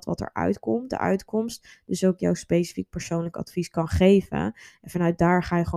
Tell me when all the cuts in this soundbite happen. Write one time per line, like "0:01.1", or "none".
none